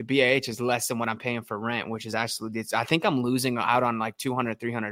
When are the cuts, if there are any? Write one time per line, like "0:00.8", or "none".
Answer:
none